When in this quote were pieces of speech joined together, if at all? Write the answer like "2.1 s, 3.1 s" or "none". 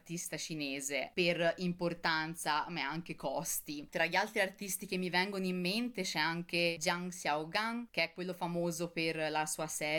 3.9 s